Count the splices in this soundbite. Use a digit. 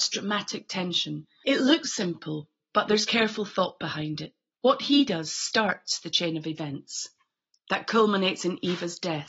2